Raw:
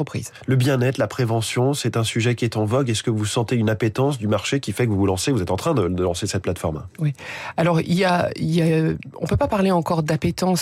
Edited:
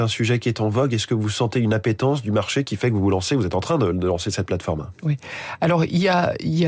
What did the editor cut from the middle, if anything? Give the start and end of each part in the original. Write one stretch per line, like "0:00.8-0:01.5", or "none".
none